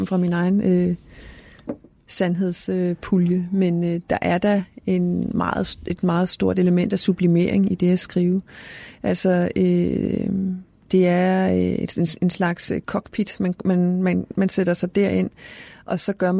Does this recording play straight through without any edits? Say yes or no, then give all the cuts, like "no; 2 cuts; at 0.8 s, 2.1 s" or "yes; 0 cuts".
yes; 0 cuts